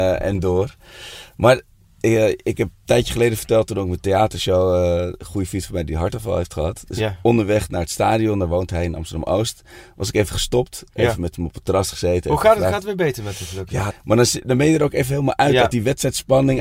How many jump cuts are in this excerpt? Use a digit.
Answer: 1